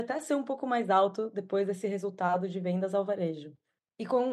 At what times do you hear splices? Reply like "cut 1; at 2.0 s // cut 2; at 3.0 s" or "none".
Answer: none